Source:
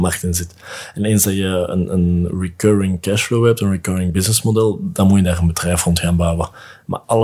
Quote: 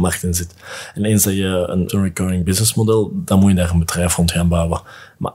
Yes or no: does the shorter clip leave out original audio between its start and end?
yes